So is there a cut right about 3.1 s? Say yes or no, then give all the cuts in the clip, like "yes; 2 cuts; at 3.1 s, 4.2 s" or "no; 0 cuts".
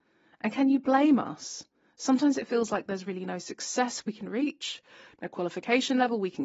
no; 0 cuts